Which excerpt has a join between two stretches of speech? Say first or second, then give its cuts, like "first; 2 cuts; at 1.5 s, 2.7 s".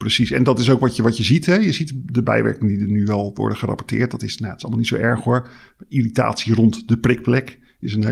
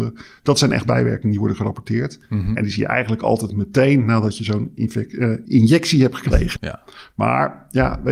second; 2 cuts; at 5.5 s, 6.6 s